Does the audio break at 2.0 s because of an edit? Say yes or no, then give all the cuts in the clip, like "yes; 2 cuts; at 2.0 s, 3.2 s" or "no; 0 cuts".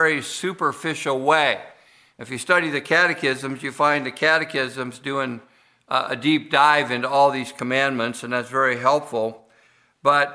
no; 0 cuts